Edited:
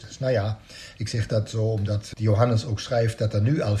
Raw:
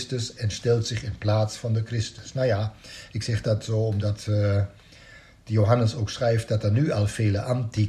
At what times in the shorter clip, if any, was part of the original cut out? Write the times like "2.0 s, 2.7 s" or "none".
2.1 s